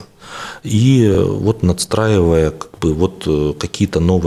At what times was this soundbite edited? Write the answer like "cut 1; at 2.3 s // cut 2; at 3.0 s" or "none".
none